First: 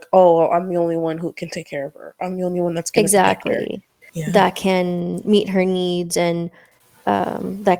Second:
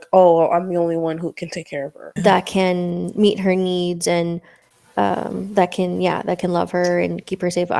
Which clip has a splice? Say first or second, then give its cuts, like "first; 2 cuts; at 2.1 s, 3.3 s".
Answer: second; 1 cut; at 2.2 s